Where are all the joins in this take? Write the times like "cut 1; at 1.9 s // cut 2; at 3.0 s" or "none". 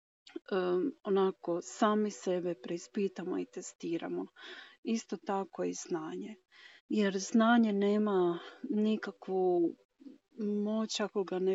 cut 1; at 6.8 s